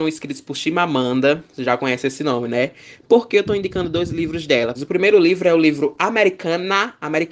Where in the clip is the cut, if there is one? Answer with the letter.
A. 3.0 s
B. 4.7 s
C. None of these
B